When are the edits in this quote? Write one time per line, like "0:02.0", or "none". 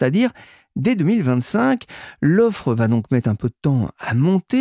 none